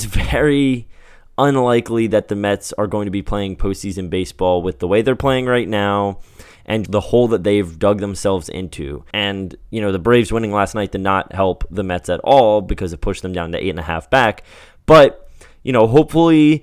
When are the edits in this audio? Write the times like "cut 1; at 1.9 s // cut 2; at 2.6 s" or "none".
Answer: cut 1; at 6.9 s // cut 2; at 9.1 s

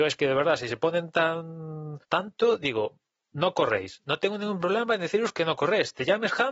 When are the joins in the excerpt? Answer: cut 1; at 2.0 s

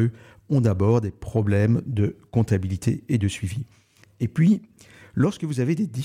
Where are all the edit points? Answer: none

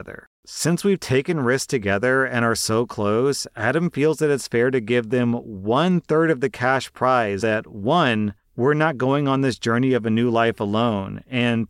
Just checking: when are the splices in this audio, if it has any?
cut 1; at 7.4 s

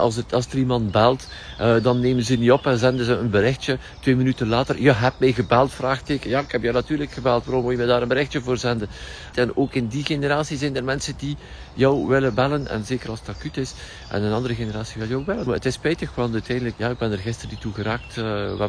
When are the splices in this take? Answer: cut 1; at 9.3 s // cut 2; at 15.5 s // cut 3; at 16.8 s

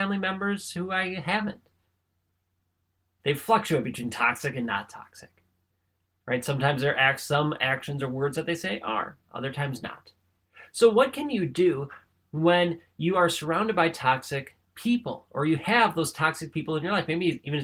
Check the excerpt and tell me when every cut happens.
cut 1; at 3.2 s

